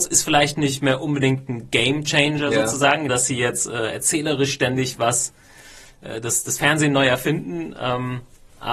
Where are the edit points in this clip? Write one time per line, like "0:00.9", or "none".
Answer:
0:03.1